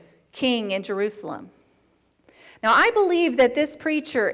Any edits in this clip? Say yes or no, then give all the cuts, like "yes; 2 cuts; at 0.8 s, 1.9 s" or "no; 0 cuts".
no; 0 cuts